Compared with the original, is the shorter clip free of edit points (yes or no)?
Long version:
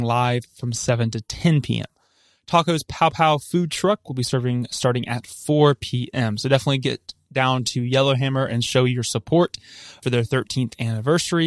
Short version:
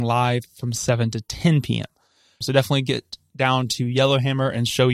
no